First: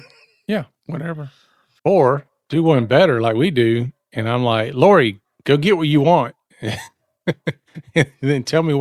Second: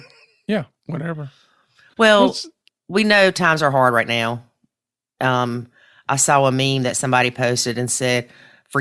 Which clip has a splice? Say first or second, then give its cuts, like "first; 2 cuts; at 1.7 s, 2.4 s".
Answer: first; 1 cut; at 1.8 s